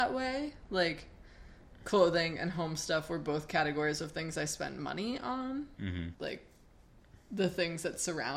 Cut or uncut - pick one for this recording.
cut